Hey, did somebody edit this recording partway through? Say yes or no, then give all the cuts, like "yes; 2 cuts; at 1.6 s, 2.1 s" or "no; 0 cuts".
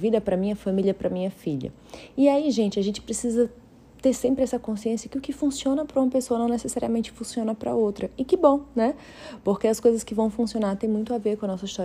no; 0 cuts